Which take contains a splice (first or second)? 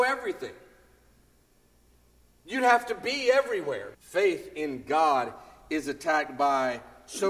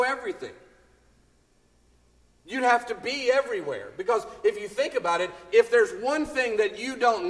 first